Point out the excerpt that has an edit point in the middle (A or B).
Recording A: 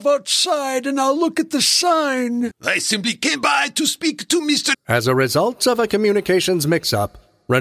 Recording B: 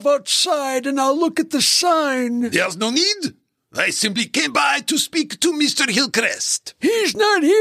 A